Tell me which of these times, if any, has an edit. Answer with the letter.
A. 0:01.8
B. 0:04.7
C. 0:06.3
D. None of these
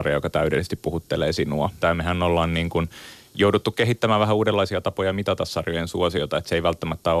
A